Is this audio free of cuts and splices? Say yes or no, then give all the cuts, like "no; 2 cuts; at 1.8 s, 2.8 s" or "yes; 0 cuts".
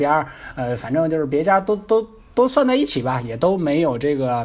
yes; 0 cuts